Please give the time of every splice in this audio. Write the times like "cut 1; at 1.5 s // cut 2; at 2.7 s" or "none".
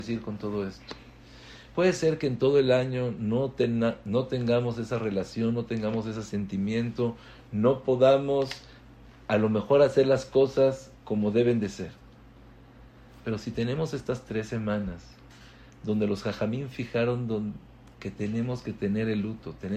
none